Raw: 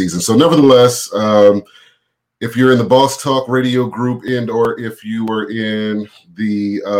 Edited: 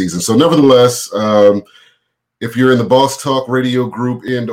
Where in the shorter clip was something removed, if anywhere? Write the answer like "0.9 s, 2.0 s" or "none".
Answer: none

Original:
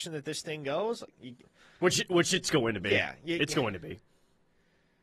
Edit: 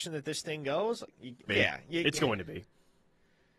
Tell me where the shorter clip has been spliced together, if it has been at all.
1.5 s

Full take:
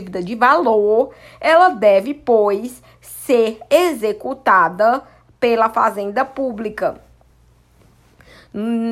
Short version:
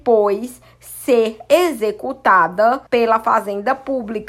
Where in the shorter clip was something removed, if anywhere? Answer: 2.9 s

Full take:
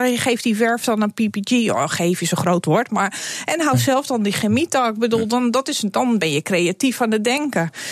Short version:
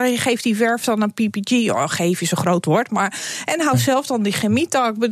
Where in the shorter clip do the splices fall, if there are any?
none

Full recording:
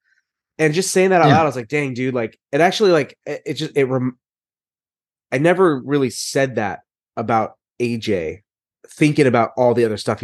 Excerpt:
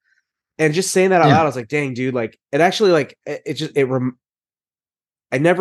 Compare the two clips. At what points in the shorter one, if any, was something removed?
none

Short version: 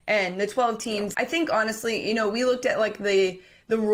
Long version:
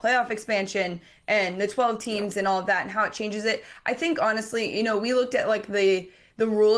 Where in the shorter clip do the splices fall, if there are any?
1.1 s

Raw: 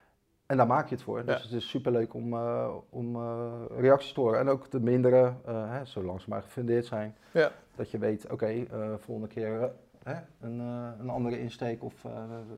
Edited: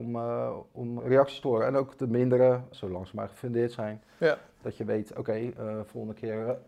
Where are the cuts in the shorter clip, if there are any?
1.0 s, 2.7 s

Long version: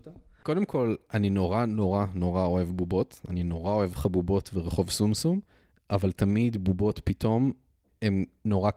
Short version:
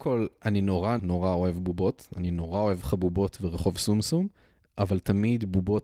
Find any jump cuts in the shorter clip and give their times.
1.0 s

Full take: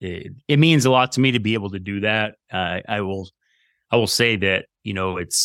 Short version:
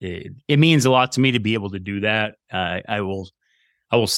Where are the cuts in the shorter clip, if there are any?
none

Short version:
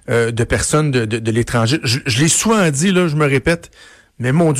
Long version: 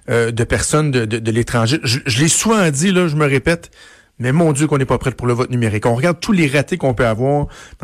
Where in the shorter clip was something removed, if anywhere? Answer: none

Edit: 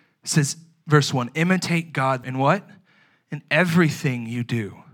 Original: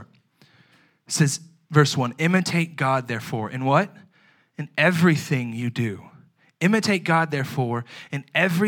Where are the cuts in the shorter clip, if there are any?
2.2 s

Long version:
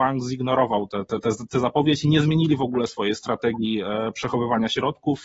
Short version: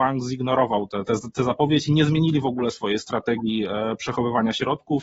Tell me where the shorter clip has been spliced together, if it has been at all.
1.1 s

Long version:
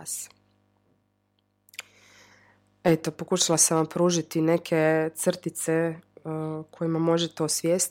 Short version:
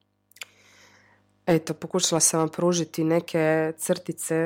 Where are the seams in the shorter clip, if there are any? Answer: none

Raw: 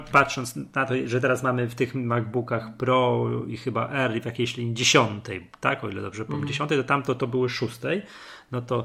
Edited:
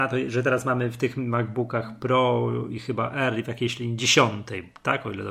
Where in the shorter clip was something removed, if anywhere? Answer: none

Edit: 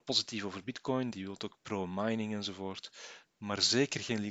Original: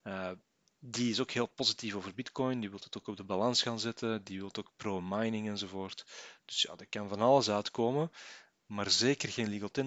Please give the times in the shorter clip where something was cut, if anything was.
1.1 s, 3.3 s

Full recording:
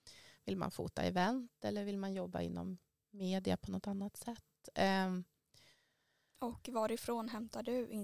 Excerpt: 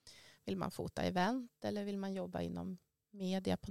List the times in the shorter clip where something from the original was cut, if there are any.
none

